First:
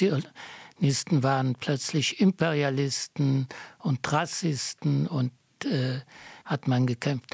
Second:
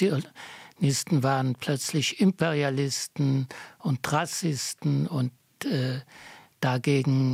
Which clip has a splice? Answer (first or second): first